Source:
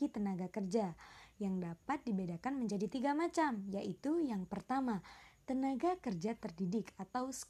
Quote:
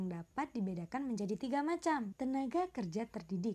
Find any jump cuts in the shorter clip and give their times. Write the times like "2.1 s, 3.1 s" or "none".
2.1 s